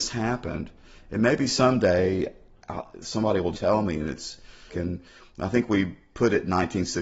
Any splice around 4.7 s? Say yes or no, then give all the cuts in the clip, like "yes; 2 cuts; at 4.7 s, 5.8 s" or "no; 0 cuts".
yes; 2 cuts; at 3.5 s, 4.7 s